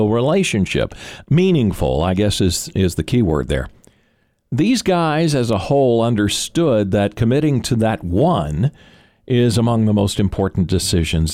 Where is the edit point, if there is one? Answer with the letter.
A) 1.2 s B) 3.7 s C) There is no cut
A